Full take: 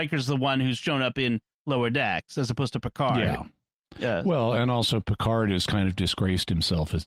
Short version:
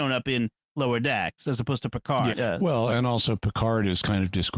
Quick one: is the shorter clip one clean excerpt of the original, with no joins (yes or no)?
no